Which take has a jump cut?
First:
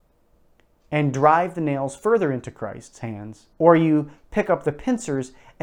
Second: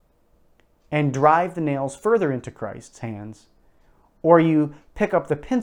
first; 1 cut; at 3.5 s

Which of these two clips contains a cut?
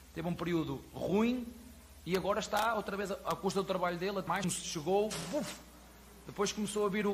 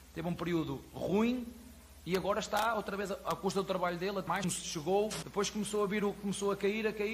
second; 1 cut; at 5.2 s

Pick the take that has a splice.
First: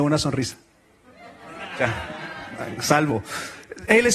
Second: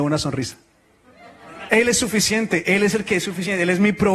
second; 1 cut; at 1.7 s

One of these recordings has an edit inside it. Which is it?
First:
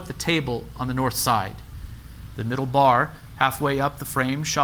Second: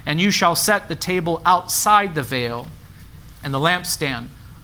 first; 1 cut; at 2.3 s

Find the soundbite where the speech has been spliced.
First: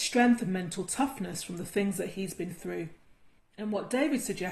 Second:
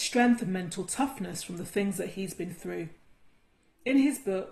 first; 1 cut; at 3.4 s

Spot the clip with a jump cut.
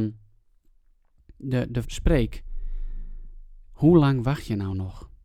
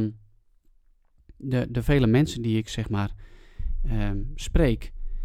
first; 2 cuts; at 1.8 s, 3.7 s

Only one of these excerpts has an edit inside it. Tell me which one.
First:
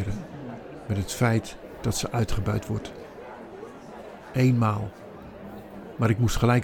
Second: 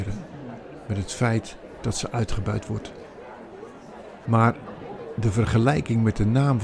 second; 1 cut; at 4.2 s

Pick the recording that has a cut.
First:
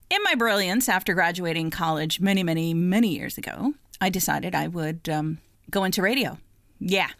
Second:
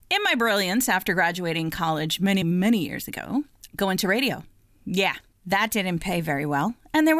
second; 2 cuts; at 2.4 s, 3.7 s

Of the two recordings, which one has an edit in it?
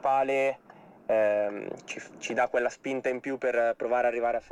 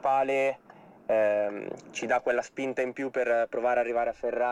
second; 1 cut; at 1.8 s

